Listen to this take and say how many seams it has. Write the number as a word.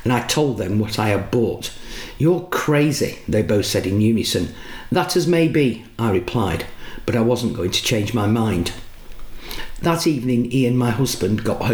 zero